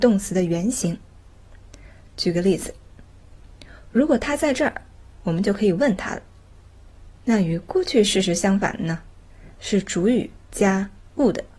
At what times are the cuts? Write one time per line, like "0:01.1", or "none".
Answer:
0:07.2
0:09.5